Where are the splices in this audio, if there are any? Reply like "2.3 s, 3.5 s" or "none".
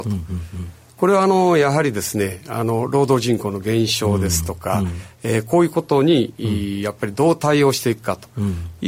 none